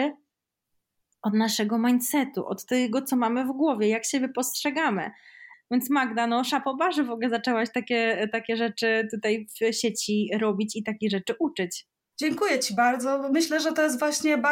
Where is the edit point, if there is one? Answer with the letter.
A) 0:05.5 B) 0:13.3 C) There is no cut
A